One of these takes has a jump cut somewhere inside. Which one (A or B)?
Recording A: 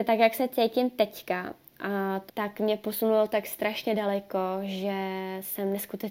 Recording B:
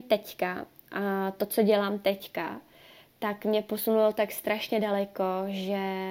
A